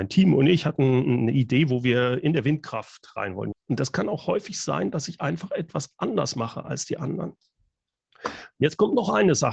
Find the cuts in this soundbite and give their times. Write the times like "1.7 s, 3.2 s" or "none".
3.5 s

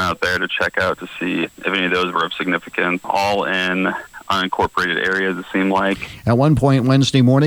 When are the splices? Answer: none

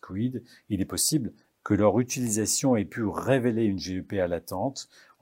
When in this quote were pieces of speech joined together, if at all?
1.5 s

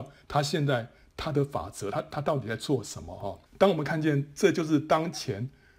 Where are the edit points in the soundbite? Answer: 3.5 s

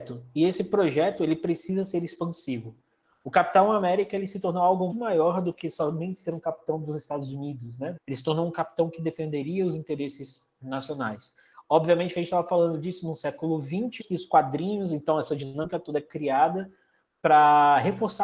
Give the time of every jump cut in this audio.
4.9 s, 7.9 s, 14.0 s

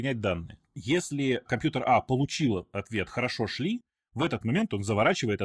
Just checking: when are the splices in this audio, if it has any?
none

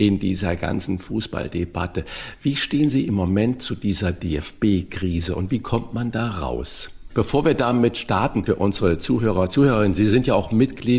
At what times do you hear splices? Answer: 7.1 s

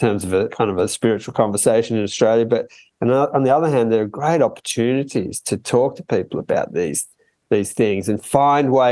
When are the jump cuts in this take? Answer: none

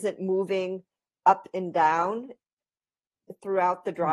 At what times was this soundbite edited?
none

